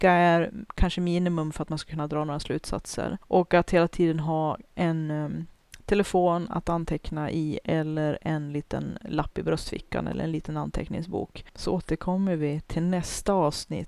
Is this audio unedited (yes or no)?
yes